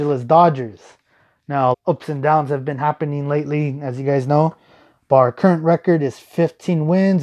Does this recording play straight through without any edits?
no; 1 cut; at 1.7 s

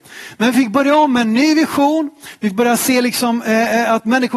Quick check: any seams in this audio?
no; 0 cuts

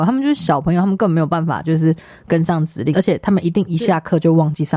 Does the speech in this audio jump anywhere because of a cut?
yes; 1 cut; at 2.9 s

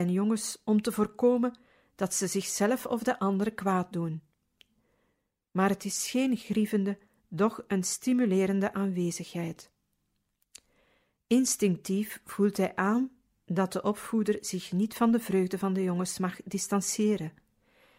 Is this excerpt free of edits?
yes; 0 cuts

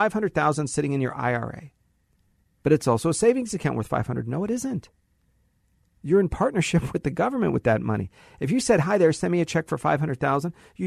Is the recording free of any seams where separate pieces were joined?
no; 1 cut; at 2.4 s

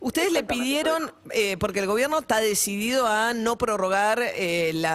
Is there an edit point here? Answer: no; 0 cuts

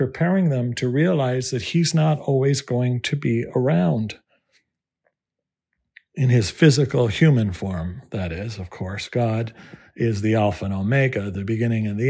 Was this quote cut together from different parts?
no; 0 cuts

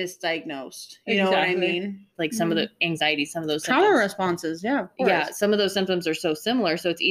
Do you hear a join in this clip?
yes; 1 cut; at 2.2 s

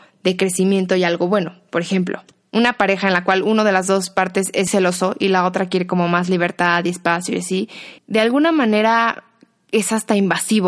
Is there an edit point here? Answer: yes; 2 cuts; at 4.7 s, 8.0 s

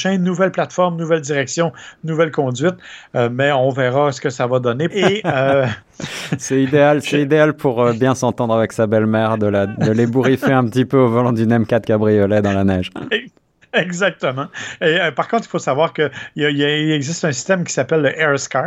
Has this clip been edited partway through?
yes; 1 cut; at 4.9 s

